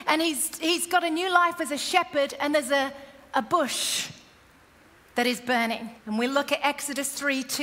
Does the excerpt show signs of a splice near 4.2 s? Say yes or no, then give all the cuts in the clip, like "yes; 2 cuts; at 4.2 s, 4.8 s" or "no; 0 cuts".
no; 1 cut; at 6.0 s